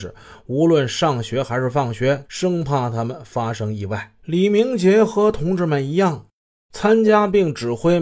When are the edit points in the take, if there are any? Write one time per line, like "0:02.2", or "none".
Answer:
0:02.2
0:04.2